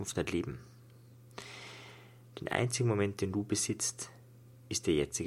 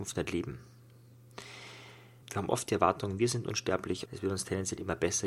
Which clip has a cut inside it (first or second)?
second